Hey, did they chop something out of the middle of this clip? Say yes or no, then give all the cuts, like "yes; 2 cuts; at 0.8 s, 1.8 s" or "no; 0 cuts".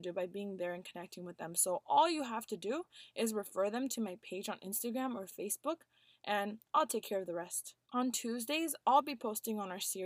yes; 1 cut; at 7.8 s